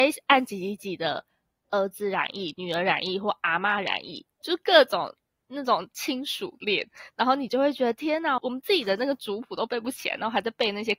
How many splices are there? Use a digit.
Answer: 2